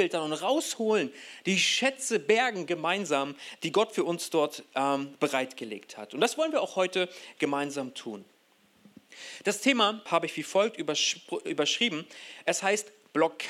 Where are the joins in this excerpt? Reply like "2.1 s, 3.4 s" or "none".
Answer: 10.1 s